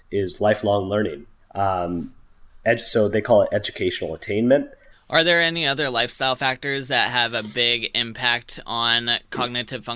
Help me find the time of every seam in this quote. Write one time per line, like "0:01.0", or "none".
0:01.4
0:04.9